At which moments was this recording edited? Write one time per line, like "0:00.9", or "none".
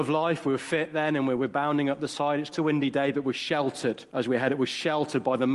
0:02.5
0:04.1